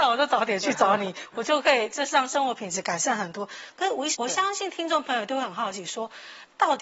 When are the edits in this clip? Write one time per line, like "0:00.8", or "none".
0:04.1

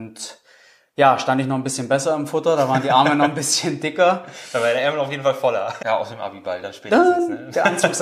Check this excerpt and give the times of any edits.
0:05.8

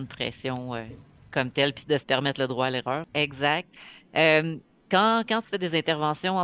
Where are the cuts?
0:03.0

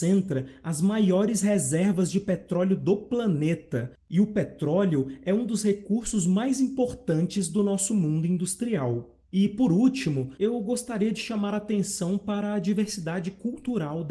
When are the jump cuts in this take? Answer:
0:09.2
0:10.4

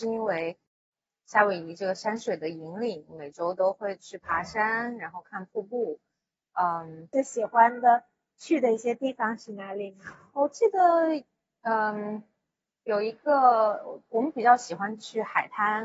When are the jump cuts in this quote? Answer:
0:07.1

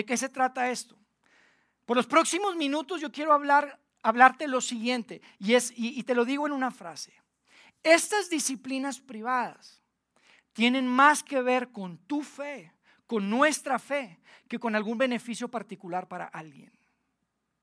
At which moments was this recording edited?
none

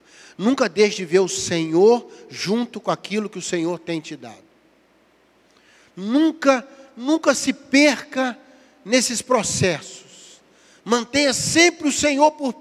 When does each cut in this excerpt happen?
none

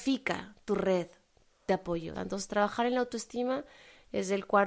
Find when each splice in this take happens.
0:02.1

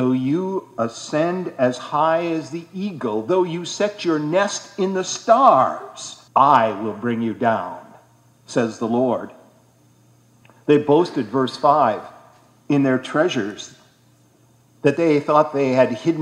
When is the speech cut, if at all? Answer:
0:06.3

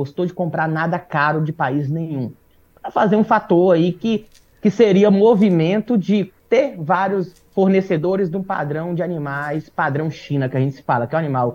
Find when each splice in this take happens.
0:02.8
0:06.4

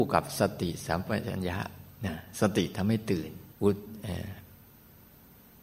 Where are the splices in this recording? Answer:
0:03.5

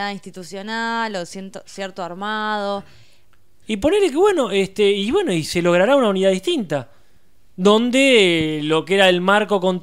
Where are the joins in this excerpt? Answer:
0:03.6

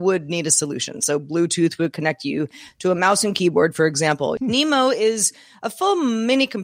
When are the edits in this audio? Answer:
0:04.4

